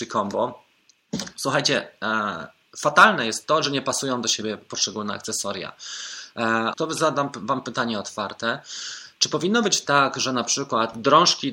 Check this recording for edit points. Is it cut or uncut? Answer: cut